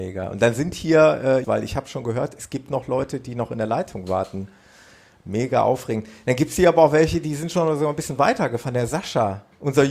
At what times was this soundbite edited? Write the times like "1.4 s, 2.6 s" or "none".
1.4 s